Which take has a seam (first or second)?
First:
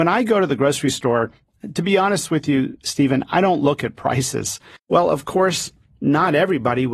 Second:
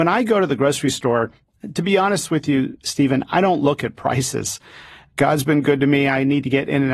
first